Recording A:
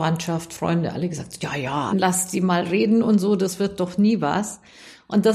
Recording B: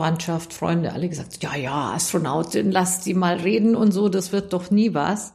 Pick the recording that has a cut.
A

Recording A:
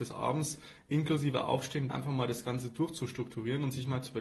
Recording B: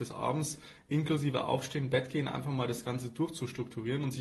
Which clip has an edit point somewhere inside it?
A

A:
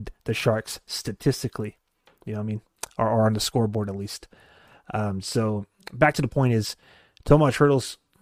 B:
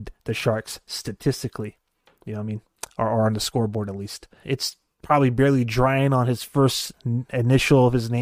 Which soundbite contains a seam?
B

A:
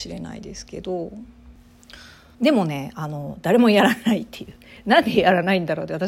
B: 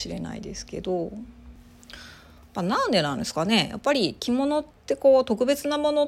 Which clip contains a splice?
A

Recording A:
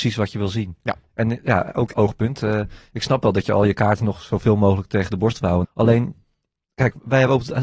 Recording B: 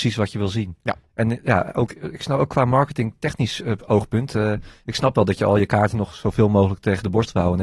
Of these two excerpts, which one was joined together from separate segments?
A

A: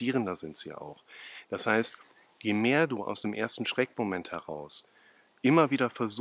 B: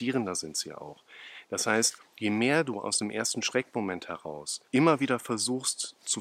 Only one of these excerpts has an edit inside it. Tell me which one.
B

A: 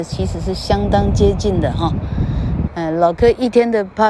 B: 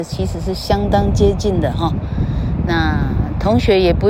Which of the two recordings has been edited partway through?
A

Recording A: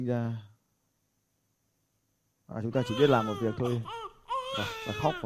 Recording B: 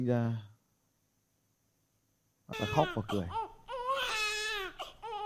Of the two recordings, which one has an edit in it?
B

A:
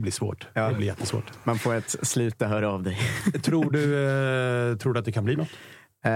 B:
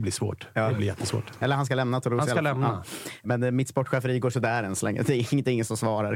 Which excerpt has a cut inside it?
B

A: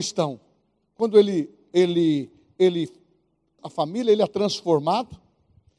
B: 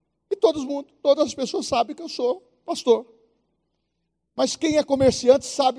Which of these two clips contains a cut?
A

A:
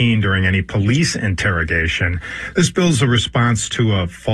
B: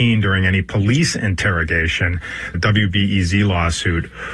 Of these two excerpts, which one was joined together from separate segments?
B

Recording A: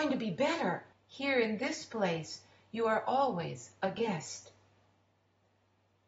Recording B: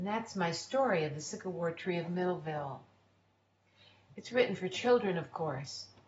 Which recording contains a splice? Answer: A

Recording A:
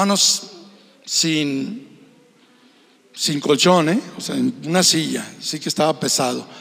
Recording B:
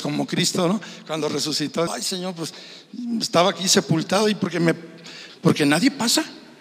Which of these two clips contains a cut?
B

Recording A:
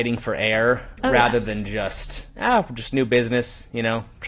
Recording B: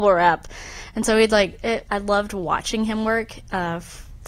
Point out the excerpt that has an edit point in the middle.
B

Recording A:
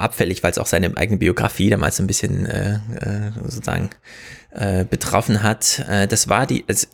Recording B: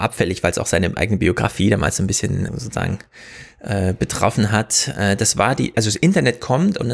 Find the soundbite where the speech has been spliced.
B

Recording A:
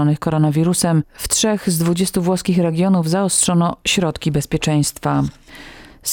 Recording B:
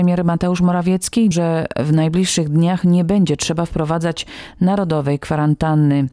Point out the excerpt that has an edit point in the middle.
B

